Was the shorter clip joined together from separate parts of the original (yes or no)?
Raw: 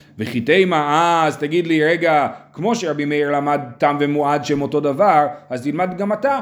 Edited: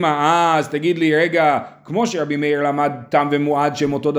no